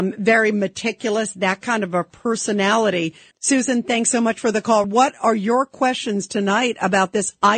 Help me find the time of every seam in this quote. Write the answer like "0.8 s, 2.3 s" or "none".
3.3 s, 4.8 s